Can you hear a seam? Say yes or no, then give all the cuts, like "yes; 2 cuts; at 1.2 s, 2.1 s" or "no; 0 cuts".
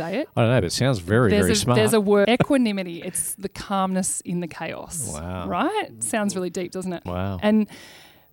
yes; 2 cuts; at 2.2 s, 7.1 s